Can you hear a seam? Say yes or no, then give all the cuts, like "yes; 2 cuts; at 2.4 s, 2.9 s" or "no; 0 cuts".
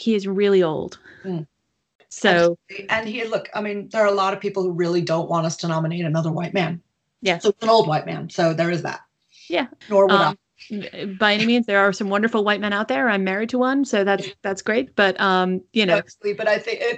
yes; 1 cut; at 9.8 s